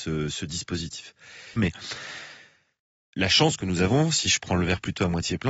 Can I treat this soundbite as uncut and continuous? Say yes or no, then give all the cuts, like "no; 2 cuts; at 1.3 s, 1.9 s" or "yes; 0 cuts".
no; 1 cut; at 1.6 s